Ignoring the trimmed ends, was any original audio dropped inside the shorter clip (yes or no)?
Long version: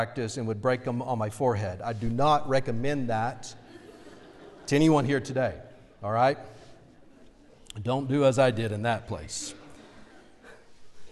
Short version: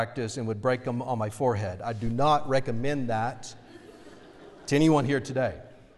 no